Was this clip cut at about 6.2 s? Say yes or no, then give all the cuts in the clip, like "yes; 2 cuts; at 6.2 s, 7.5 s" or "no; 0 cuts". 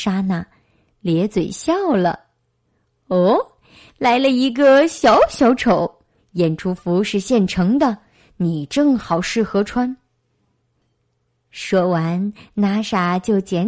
yes; 2 cuts; at 6.2 s, 10.6 s